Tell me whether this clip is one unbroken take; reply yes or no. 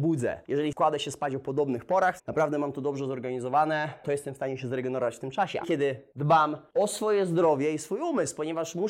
no